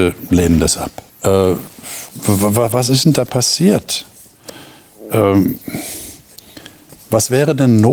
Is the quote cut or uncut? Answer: cut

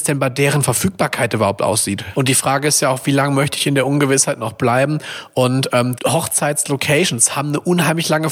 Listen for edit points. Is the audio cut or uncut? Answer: cut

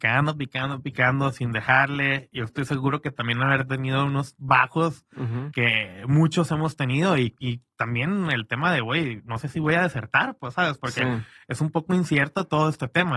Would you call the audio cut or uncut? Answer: uncut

